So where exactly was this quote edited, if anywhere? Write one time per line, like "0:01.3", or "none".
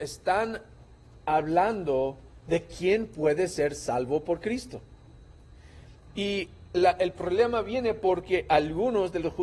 none